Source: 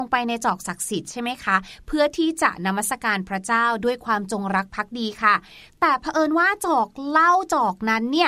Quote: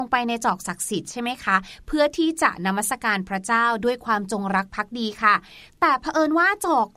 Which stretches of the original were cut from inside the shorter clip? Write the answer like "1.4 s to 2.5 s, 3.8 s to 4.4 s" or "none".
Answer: none